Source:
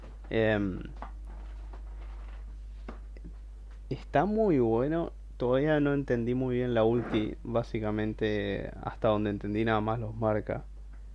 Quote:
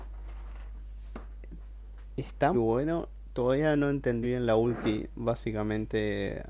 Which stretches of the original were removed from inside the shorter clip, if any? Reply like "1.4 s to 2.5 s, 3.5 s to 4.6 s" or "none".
4.3 s to 4.6 s, 6.3 s to 6.5 s

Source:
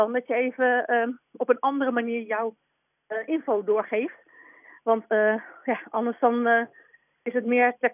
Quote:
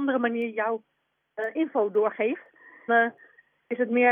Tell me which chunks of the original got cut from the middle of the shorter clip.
4.6 s to 6.4 s

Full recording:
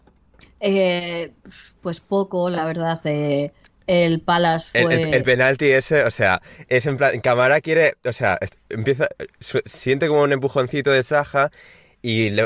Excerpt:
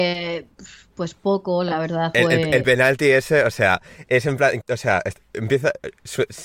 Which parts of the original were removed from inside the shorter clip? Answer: 3.0 s to 4.7 s, 7.2 s to 8.0 s

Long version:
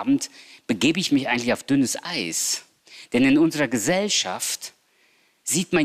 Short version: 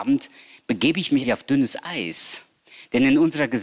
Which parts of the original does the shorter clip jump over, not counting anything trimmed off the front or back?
1.2 s to 1.4 s

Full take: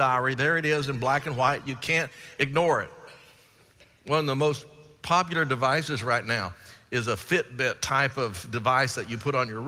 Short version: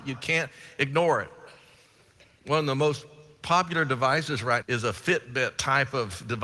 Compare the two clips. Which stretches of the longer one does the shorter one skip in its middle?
6.2 s to 6.9 s

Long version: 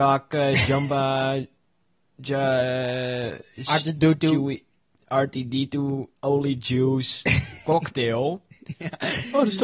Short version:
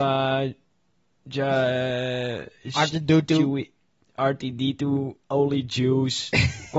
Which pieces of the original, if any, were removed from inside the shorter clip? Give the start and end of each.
none

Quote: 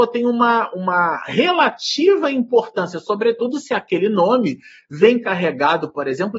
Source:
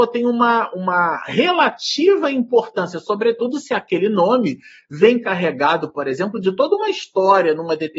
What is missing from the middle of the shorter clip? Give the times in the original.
none

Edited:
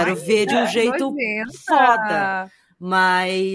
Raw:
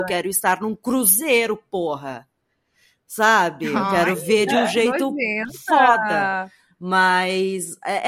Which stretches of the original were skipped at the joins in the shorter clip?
none

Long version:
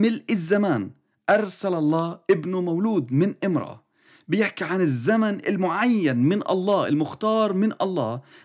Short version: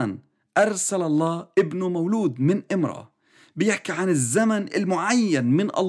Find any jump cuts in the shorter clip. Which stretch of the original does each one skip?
none

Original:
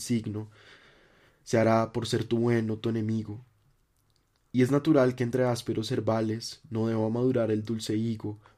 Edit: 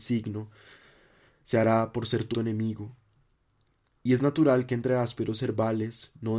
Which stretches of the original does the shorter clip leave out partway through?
2.3 s to 2.8 s

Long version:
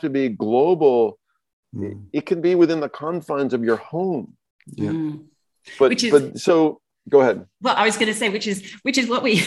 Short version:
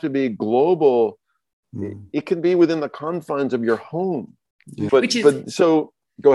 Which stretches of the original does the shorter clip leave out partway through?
4.9 s to 5.8 s

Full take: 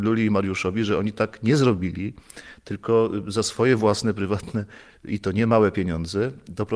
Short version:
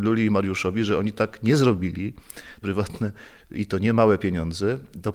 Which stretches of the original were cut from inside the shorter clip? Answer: 2.6 s to 4.1 s

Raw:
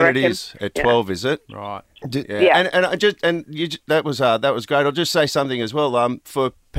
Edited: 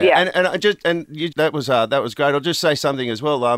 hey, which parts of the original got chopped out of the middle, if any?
3.7 s to 3.8 s

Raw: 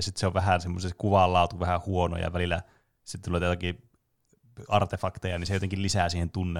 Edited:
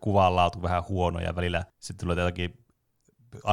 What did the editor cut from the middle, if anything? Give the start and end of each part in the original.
2.7 s to 2.9 s

